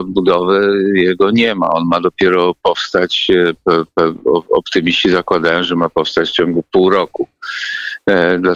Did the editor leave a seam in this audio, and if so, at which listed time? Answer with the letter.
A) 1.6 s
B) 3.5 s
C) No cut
C